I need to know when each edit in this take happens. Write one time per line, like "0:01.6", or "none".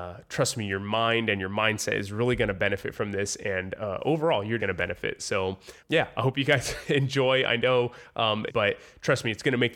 0:04.6
0:05.8
0:08.5